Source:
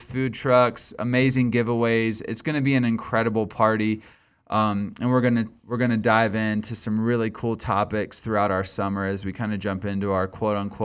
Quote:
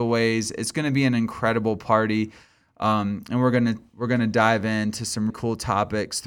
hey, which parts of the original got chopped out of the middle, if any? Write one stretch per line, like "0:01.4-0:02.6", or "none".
0:07.0-0:07.3